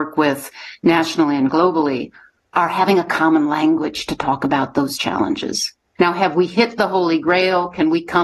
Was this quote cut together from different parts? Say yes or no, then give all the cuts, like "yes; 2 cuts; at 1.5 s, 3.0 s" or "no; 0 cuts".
yes; 1 cut; at 6.0 s